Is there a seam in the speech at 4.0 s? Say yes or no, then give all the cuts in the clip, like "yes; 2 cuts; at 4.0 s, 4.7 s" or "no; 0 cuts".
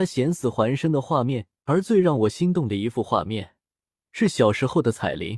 no; 1 cut; at 1.6 s